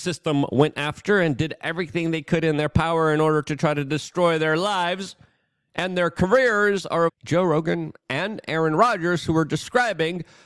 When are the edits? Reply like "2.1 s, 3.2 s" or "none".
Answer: 7.1 s